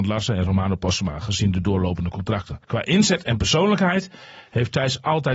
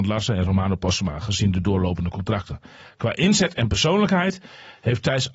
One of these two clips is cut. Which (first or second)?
first